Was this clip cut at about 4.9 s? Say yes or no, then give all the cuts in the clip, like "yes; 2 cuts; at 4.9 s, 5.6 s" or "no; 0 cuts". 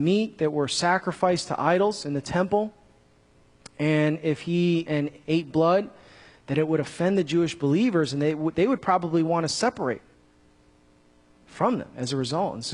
yes; 1 cut; at 4.9 s